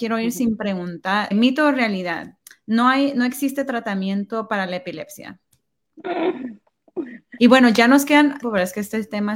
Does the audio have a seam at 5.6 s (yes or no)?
no